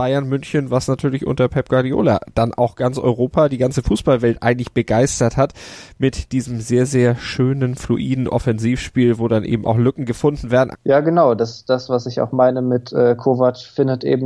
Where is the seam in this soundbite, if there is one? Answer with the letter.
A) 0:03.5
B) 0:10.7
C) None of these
B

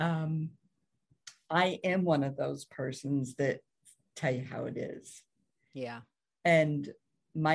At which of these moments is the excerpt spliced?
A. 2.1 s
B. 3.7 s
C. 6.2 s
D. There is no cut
D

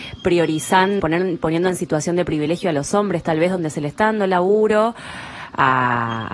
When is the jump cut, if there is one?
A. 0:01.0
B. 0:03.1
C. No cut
A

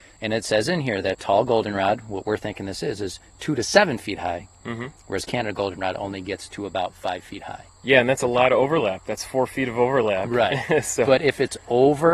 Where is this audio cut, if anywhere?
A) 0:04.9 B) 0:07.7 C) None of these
C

